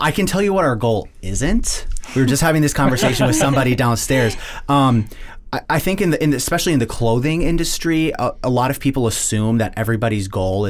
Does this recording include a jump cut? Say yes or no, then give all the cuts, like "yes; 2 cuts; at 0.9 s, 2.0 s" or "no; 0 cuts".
no; 0 cuts